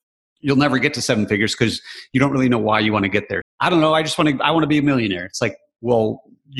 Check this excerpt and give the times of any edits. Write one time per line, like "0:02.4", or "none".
0:03.4